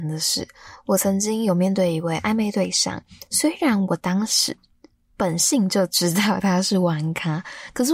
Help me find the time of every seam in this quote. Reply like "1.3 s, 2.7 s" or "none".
none

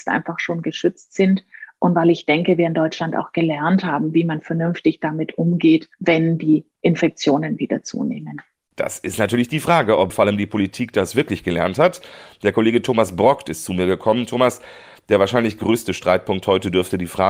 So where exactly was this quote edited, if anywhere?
5.9 s

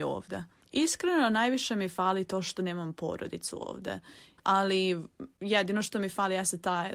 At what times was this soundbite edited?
4.4 s

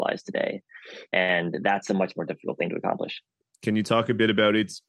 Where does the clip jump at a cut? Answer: 3.5 s

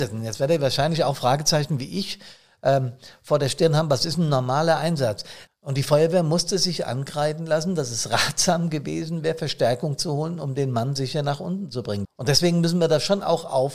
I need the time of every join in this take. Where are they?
5.5 s, 12.0 s

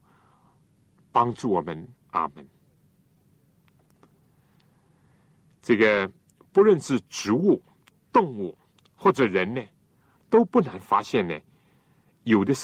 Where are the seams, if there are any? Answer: 2.0 s

